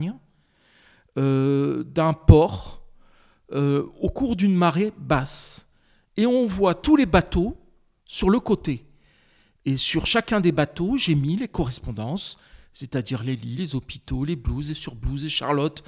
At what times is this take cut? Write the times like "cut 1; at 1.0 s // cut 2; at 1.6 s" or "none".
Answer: none